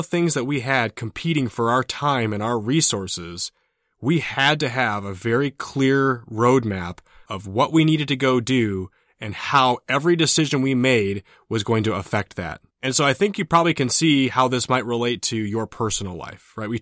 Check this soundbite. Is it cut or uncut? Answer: cut